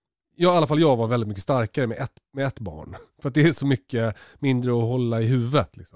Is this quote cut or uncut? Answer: uncut